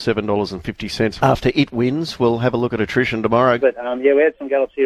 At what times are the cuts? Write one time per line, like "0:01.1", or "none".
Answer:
0:01.2
0:03.6